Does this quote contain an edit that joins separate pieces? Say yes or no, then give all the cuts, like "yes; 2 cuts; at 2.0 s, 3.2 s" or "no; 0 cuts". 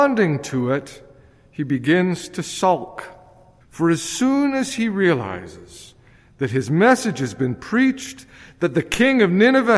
yes; 1 cut; at 3.6 s